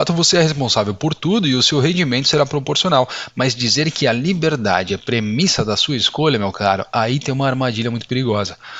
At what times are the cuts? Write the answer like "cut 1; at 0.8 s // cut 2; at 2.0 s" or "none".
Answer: none